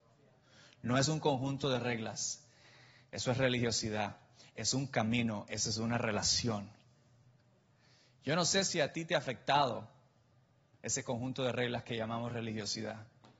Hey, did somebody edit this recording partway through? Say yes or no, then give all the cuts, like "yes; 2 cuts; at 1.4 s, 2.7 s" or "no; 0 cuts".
no; 0 cuts